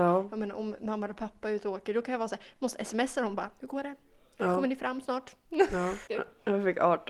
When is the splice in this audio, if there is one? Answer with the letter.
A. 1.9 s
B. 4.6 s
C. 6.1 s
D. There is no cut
C